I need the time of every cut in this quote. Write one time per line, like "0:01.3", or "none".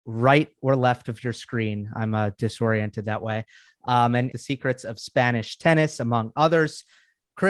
0:04.3